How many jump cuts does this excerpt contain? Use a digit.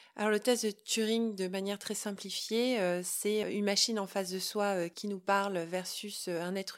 1